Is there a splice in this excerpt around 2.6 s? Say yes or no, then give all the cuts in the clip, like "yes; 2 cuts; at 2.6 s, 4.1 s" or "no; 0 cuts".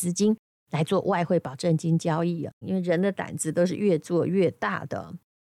yes; 1 cut; at 2.6 s